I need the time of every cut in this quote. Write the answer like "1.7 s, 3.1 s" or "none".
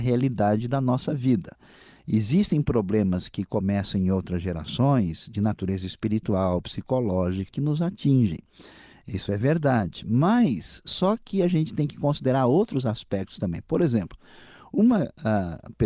7.5 s